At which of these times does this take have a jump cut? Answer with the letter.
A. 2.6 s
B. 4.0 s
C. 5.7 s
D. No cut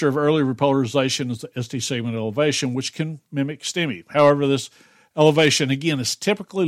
D